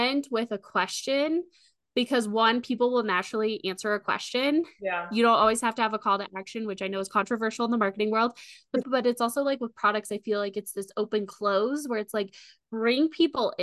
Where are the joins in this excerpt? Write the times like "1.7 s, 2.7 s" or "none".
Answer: 8.8 s